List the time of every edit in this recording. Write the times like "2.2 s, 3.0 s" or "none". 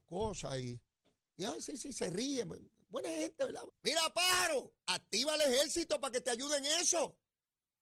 3.7 s, 4.8 s